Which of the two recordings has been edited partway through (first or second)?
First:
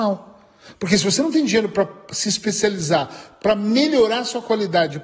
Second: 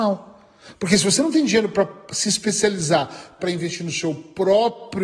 second